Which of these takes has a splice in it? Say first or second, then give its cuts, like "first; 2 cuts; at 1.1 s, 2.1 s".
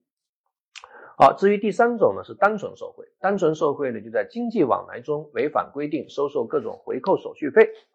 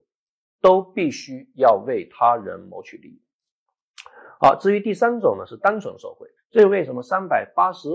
second; 1 cut; at 6.4 s